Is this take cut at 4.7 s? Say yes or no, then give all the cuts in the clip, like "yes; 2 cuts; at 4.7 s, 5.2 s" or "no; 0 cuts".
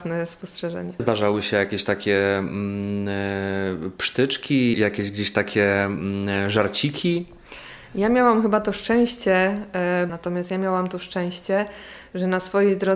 yes; 3 cuts; at 1.0 s, 4.7 s, 10.1 s